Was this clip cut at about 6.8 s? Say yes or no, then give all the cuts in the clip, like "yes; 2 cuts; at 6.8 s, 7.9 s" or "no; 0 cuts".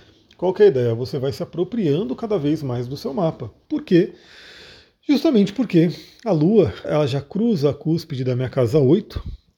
yes; 2 cuts; at 3.6 s, 6.8 s